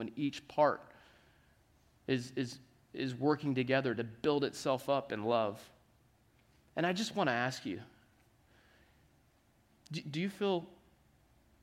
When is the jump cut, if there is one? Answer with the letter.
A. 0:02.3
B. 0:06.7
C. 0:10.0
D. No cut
C